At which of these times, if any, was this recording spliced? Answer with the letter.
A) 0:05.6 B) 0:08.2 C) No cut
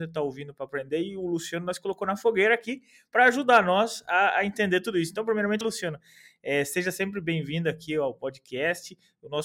A